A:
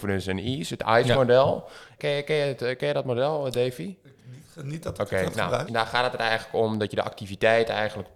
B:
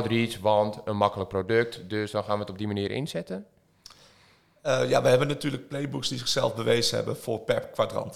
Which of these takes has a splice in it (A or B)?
A